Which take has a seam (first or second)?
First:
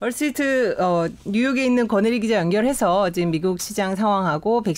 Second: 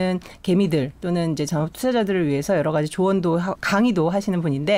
second